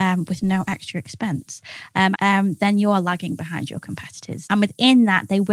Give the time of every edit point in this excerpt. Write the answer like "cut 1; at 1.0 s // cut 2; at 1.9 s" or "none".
cut 1; at 2.1 s // cut 2; at 4.4 s